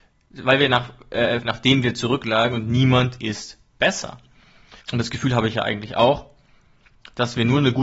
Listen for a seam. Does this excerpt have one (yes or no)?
yes